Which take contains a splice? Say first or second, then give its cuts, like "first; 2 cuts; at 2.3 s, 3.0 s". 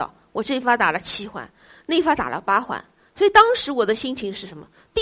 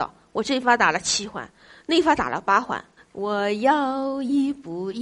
second; 1 cut; at 3.0 s